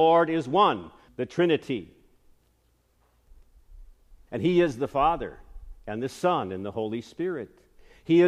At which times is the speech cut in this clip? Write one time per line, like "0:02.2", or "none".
0:01.1
0:04.3